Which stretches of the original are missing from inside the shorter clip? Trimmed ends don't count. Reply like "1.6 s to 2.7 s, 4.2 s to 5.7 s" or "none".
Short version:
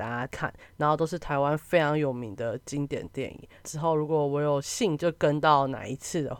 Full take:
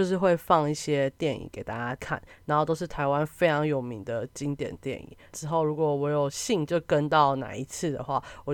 none